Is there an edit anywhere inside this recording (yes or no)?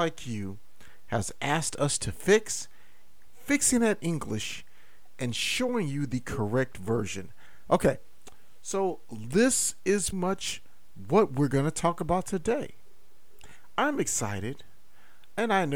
yes